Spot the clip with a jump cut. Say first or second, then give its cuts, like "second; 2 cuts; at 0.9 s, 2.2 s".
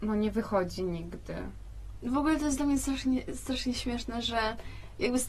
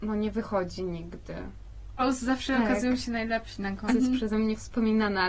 second; 2 cuts; at 2.0 s, 3.9 s